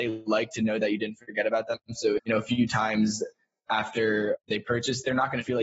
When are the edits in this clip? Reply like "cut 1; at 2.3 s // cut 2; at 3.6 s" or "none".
cut 1; at 2.2 s